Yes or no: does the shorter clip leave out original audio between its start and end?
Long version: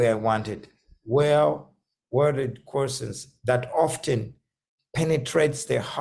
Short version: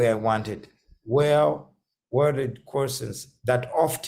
no